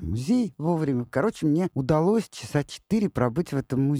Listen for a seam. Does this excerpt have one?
no; 0 cuts

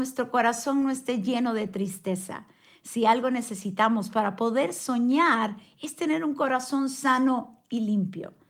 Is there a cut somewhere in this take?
no; 0 cuts

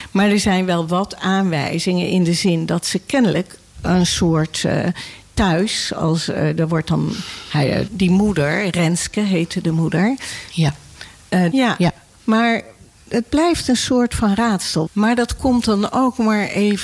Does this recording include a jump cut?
yes; 3 cuts; at 7.9 s, 11.5 s, 14.9 s

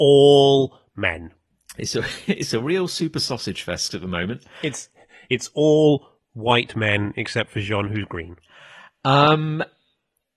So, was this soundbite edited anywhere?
no; 0 cuts

